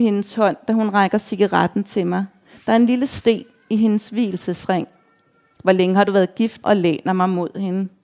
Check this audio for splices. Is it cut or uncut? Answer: cut